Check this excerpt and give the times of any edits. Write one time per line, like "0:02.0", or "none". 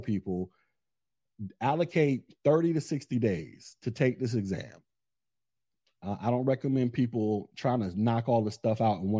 none